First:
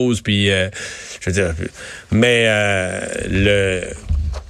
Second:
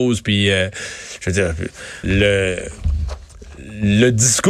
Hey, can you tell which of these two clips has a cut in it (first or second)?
second